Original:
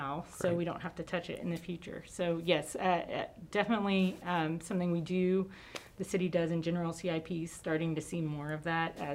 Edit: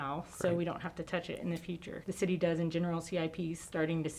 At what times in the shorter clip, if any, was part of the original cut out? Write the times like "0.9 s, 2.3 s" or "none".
2.0 s